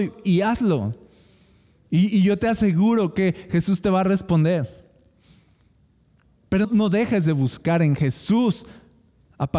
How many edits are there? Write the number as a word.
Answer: one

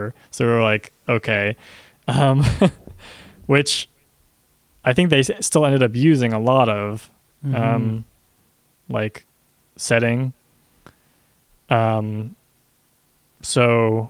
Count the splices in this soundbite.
one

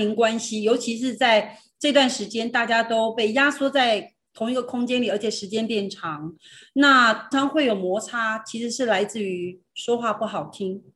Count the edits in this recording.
one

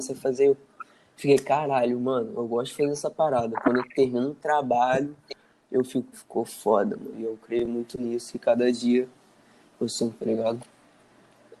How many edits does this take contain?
three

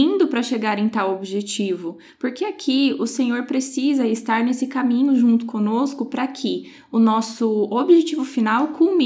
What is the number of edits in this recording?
zero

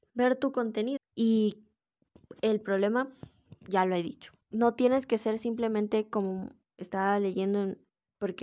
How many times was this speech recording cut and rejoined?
two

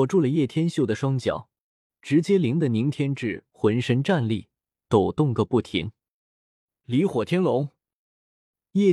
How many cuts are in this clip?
one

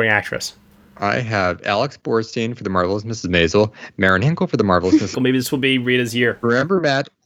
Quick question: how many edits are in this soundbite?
two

